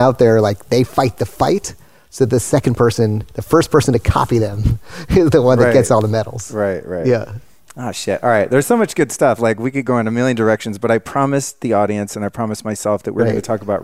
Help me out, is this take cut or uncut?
uncut